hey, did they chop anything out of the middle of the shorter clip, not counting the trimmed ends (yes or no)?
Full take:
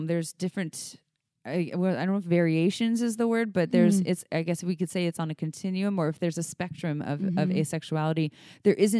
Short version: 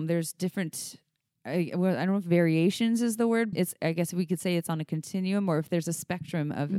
yes